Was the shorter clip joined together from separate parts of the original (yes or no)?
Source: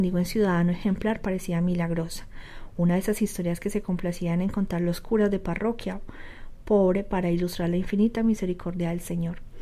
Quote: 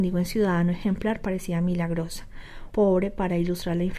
yes